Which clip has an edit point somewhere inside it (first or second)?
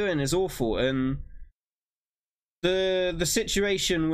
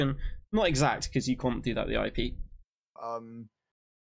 second